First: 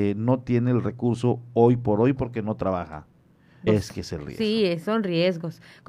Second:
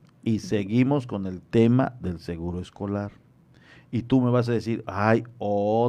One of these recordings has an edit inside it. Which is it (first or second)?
first